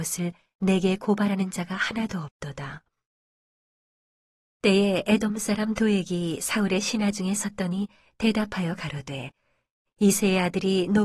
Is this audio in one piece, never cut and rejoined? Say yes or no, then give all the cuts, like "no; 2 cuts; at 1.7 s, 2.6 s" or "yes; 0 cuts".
yes; 0 cuts